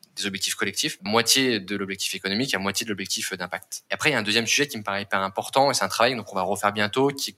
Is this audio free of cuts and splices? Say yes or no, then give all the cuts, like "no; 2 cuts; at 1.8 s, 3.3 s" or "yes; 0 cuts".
no; 2 cuts; at 1.1 s, 3.9 s